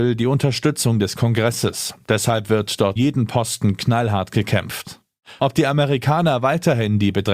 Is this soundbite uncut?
no; 2 cuts; at 3.0 s, 5.4 s

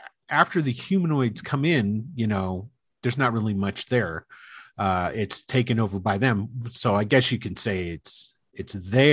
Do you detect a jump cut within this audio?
no; 0 cuts

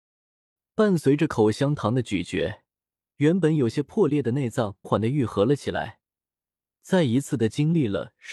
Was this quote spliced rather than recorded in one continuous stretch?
yes; 1 cut; at 4.8 s

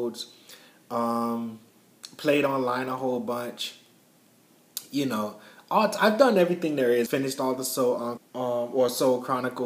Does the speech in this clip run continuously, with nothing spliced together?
no; 2 cuts; at 7.1 s, 8.2 s

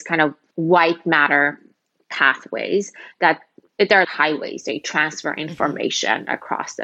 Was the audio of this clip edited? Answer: yes; 1 cut; at 4.0 s

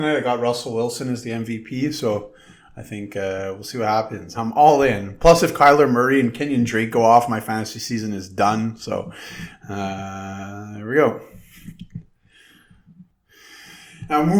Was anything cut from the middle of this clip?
yes; 1 cut; at 4.3 s

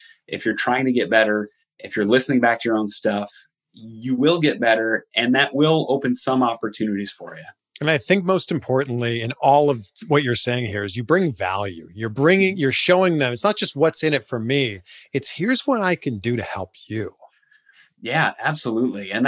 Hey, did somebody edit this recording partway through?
no; 0 cuts

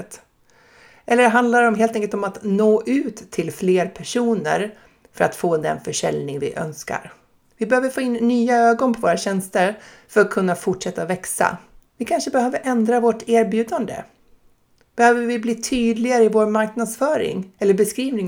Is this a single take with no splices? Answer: no; 2 cuts; at 7.4 s, 11.9 s

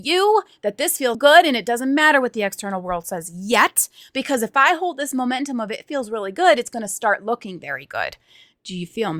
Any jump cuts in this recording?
yes; 1 cut; at 1.1 s

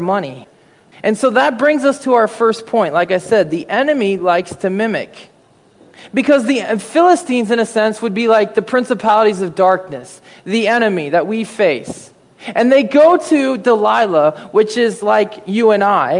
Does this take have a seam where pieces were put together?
no; 0 cuts

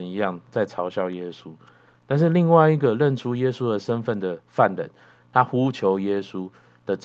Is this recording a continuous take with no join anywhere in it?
yes; 0 cuts

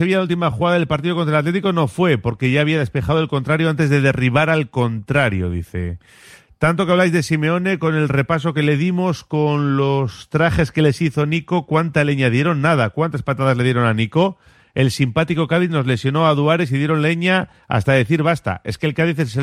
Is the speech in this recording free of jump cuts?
yes; 0 cuts

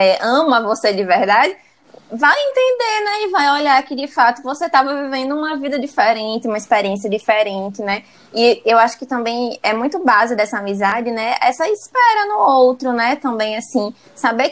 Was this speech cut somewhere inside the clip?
no; 0 cuts

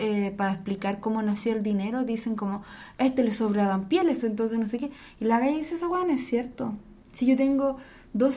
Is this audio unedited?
no; 1 cut; at 4.2 s

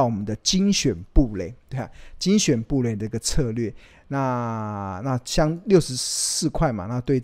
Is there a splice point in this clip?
no; 0 cuts

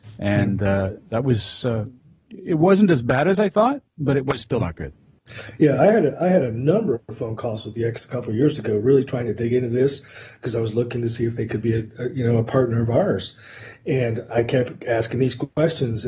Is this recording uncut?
yes; 0 cuts

